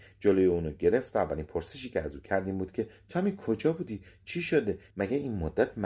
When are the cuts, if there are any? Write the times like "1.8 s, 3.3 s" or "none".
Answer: 4.9 s